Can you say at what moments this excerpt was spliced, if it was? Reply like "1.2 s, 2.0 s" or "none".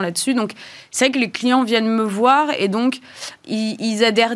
3.4 s